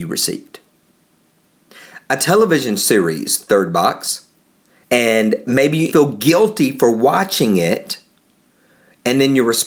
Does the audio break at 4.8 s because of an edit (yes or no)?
yes